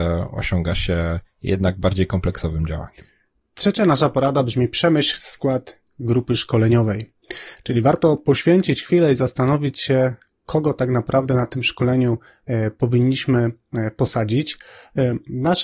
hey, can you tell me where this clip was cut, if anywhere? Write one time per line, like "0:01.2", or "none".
none